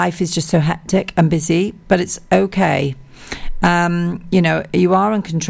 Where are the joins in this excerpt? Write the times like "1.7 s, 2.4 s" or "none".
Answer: none